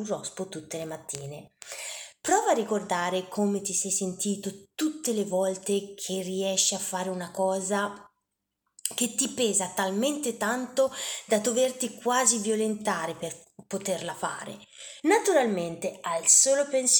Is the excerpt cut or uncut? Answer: cut